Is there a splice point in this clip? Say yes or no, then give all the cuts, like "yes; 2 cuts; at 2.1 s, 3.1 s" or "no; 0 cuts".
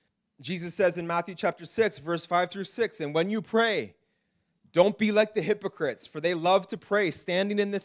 no; 0 cuts